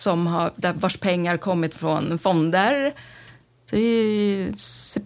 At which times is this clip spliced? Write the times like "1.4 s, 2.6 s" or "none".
3.6 s